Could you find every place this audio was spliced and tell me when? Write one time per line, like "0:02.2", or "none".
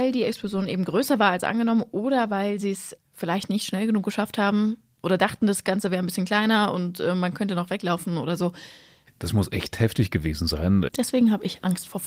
0:03.0
0:09.1
0:10.9